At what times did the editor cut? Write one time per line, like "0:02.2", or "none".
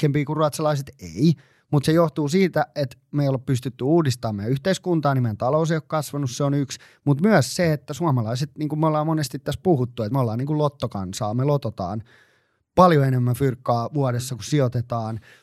none